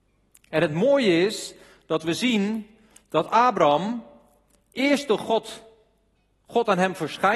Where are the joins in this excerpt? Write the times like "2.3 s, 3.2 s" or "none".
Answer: none